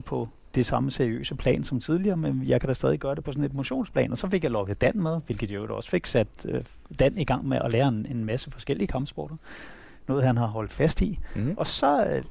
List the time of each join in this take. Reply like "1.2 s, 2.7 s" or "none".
none